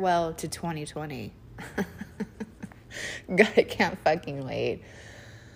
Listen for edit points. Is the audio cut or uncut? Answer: uncut